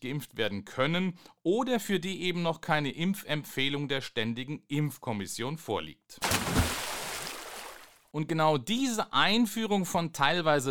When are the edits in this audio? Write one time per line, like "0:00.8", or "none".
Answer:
none